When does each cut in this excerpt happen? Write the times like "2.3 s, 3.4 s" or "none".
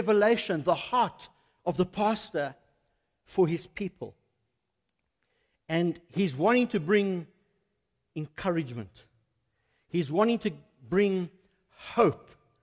none